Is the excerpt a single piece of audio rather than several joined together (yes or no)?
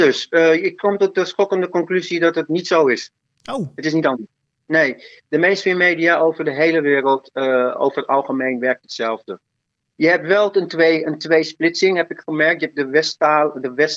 yes